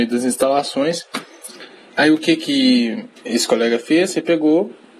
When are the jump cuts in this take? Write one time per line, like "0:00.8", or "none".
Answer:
0:01.9
0:03.2